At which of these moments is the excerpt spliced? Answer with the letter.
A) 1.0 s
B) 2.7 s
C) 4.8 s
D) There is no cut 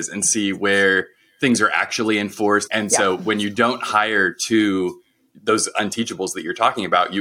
B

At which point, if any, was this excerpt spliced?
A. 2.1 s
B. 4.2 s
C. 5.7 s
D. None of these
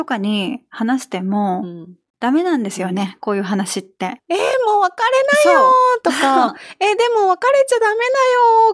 B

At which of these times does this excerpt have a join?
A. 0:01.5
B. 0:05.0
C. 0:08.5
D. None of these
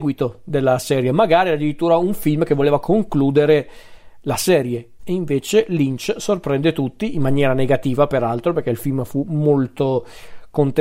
B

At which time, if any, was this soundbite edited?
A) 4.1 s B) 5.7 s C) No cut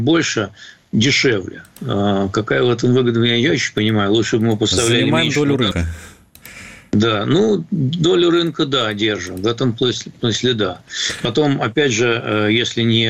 B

